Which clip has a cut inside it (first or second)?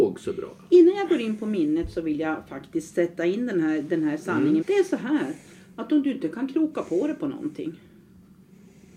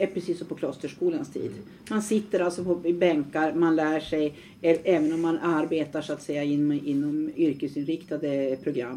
first